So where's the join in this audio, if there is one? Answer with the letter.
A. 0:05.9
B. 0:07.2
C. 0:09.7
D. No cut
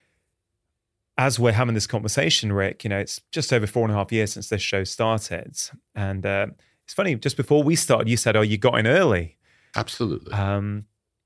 C